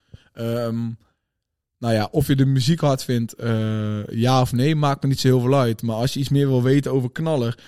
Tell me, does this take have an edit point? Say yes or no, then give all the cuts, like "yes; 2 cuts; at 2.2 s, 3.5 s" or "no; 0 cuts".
no; 0 cuts